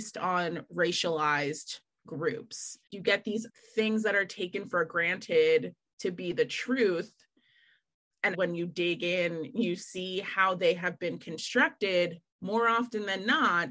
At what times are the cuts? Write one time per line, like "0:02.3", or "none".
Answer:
0:08.3
0:12.3